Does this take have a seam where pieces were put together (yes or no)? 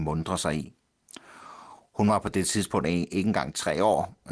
no